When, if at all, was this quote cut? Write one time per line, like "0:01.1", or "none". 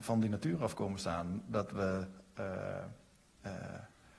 none

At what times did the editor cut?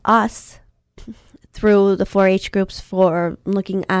none

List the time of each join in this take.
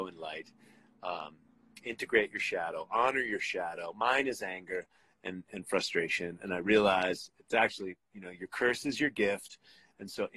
none

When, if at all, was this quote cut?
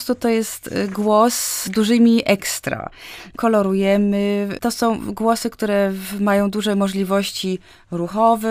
none

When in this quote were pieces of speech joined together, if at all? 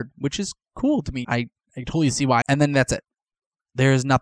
0:01.2
0:02.4

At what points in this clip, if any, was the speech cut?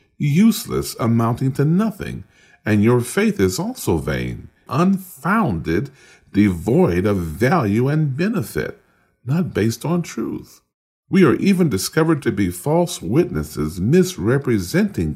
0:04.7

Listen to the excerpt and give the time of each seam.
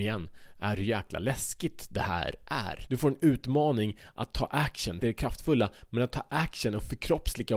0:02.9
0:05.0

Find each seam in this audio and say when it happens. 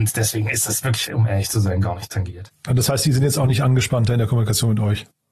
0:01.1

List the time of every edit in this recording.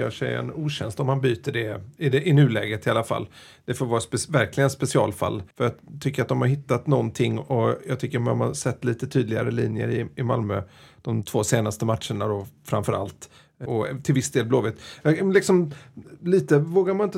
0:05.5
0:13.7

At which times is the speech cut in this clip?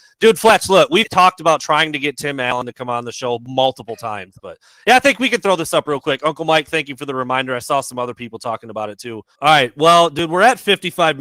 0:01.0
0:04.4
0:09.4

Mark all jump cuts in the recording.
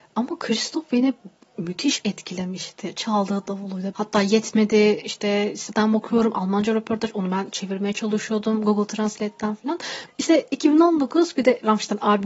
0:01.5
0:03.9
0:10.1

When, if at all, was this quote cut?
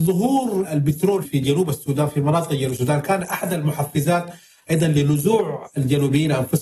0:01.2

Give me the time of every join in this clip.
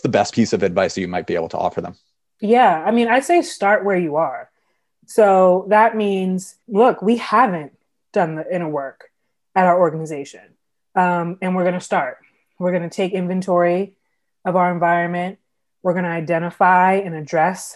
0:06.6

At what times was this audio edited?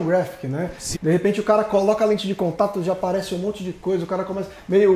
0:00.9

